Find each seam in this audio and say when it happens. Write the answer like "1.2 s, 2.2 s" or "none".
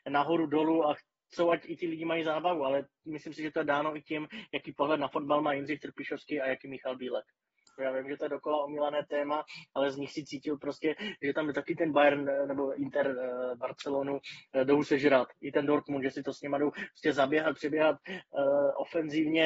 7.8 s